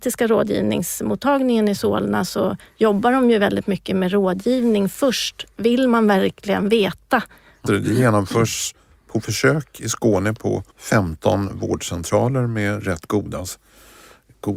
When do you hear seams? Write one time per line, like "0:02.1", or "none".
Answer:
0:07.7
0:10.7

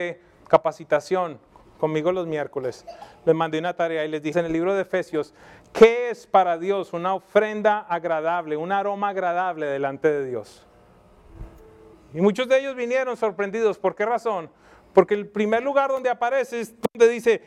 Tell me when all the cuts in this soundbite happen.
0:04.3
0:11.9

